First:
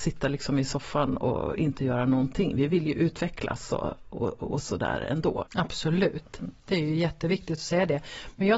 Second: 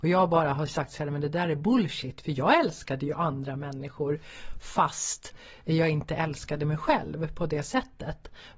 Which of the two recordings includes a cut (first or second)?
first